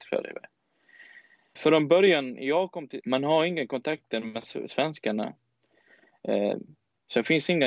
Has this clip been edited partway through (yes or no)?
yes